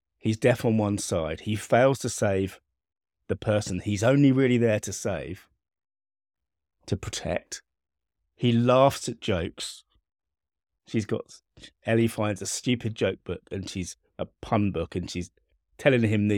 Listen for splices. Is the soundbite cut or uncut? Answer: uncut